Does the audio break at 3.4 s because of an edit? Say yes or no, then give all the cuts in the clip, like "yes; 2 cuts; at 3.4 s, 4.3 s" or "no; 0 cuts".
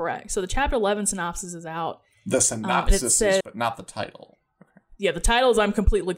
yes; 1 cut; at 3.4 s